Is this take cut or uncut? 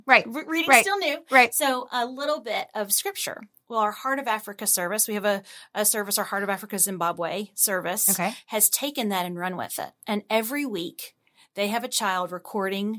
uncut